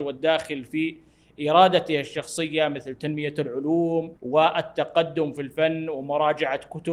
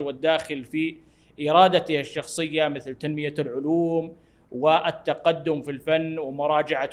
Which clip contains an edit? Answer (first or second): first